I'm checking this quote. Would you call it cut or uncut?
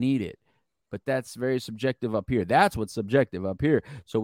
uncut